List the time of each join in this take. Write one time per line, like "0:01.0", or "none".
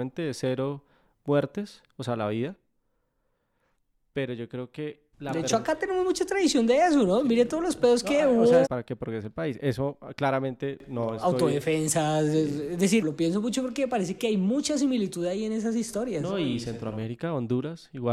0:05.1
0:08.7
0:13.0